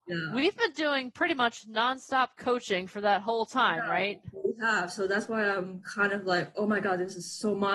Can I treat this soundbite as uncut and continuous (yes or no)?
yes